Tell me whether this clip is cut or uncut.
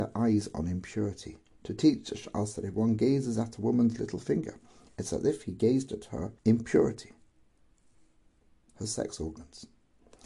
cut